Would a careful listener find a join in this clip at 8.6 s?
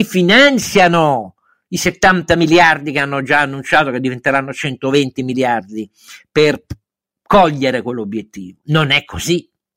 yes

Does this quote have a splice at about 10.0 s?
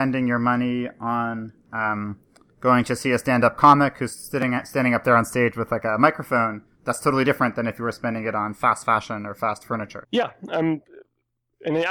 yes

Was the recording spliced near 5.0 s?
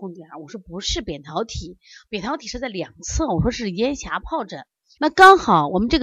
yes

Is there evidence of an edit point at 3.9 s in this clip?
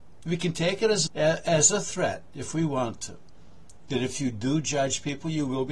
no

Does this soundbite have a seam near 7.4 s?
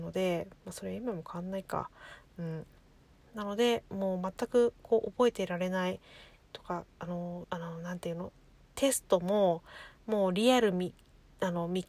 yes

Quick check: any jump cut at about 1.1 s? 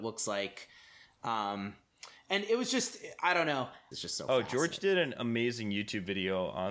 no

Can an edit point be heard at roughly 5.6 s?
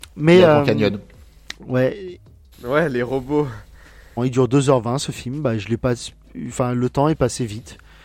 no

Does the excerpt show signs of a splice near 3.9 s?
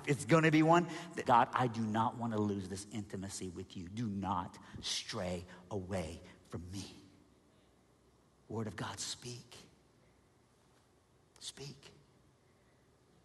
no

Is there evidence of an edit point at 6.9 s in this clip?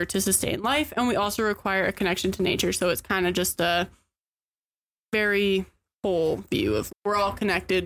yes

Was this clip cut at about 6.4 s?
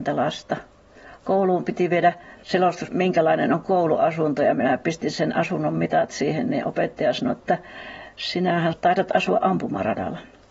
no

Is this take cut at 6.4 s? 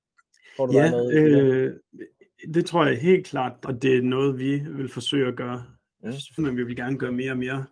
yes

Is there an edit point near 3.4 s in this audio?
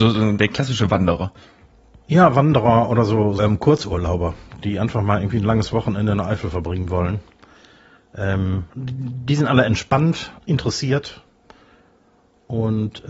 yes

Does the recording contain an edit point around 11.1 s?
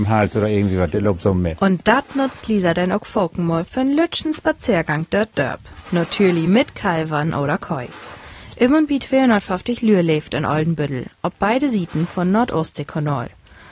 no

